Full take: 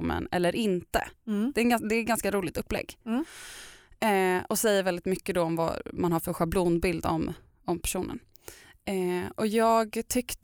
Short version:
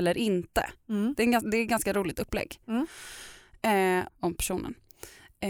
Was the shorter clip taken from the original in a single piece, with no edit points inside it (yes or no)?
no